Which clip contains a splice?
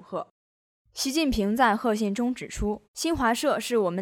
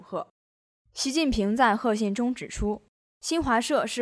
first; 1 cut; at 2.8 s

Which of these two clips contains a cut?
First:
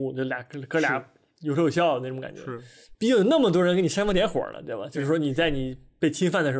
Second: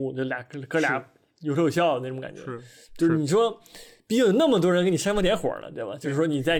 first; 1 cut; at 2.9 s

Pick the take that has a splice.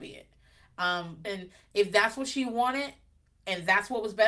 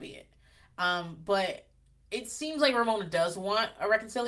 first; 1 cut; at 1.2 s

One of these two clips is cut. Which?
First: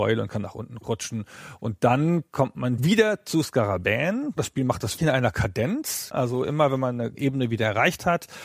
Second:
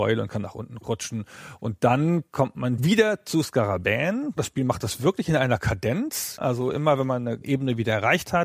first; 1 cut; at 5.0 s

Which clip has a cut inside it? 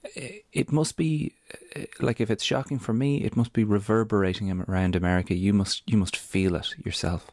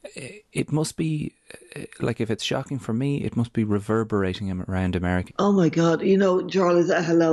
second; 1 cut; at 5.3 s

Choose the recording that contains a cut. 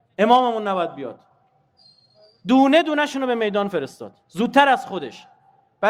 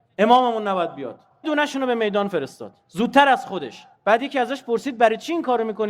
second; 2 cuts; at 1.4 s, 3.9 s

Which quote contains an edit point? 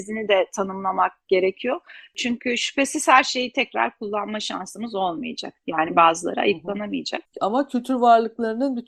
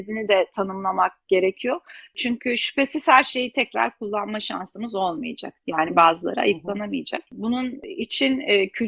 first; 1 cut; at 7.2 s

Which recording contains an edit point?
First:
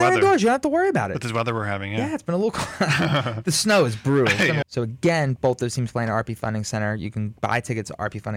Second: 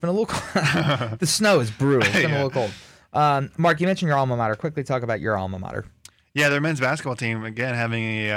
first; 1 cut; at 4.6 s

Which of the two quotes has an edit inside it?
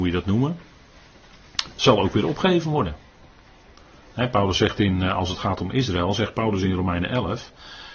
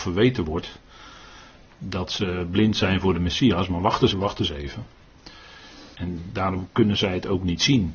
second; 2 cuts; at 4.1 s, 5.9 s

